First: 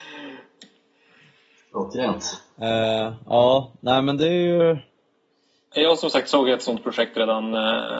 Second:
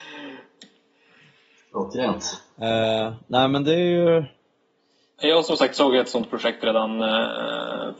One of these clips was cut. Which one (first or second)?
second